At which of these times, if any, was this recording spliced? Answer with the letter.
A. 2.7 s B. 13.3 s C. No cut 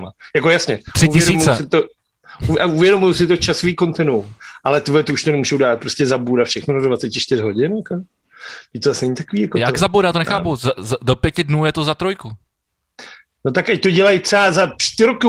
C